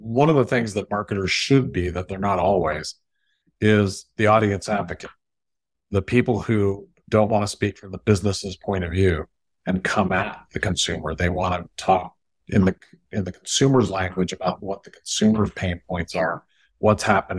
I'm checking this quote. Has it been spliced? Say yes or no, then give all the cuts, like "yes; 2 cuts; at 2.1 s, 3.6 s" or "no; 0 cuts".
no; 0 cuts